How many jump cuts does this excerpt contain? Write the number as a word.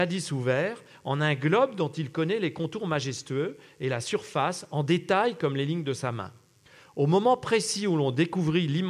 zero